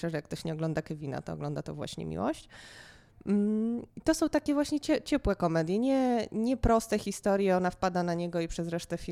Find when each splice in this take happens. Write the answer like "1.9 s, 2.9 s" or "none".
3.9 s